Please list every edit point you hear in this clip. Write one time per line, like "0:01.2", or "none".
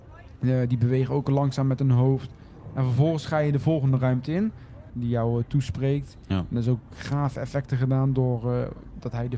0:04.9